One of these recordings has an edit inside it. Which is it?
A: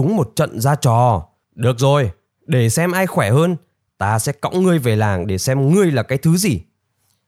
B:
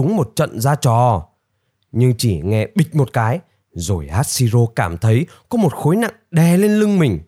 A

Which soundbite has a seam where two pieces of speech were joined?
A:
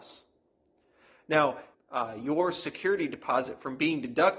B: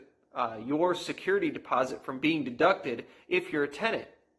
A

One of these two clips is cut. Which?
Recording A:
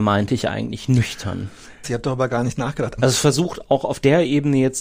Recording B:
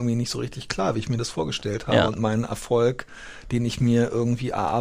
A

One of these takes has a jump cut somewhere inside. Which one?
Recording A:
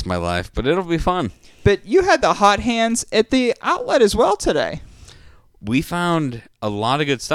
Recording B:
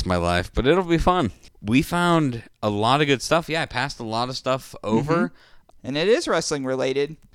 B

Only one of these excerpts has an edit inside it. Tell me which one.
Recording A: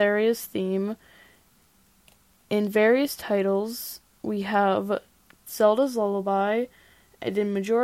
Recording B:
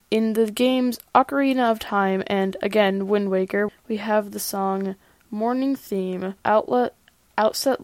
B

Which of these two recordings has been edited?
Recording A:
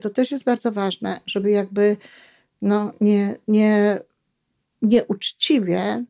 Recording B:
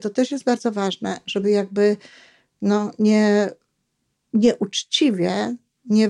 B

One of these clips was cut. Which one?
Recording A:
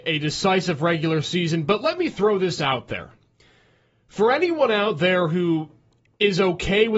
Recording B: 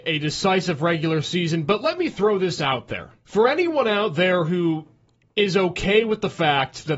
B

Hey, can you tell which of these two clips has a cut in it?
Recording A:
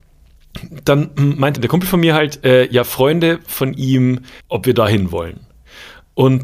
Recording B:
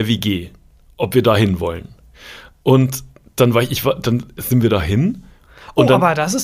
A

